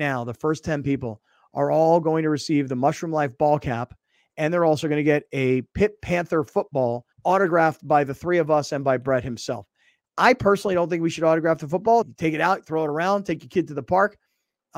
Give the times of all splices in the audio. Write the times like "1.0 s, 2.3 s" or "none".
7.1 s, 12.0 s